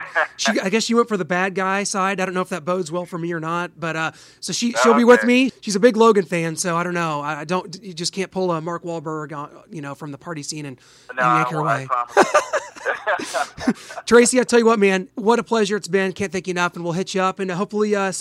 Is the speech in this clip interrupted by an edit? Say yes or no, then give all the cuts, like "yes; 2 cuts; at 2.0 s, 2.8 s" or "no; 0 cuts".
yes; 1 cut; at 5.5 s